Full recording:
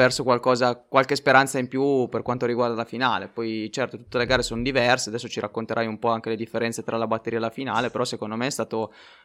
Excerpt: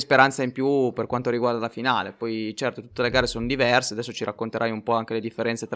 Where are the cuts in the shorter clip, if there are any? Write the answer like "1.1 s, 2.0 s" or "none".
none